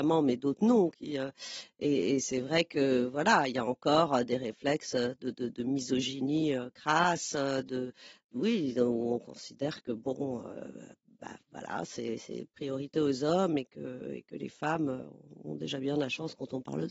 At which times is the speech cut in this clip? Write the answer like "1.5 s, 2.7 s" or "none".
none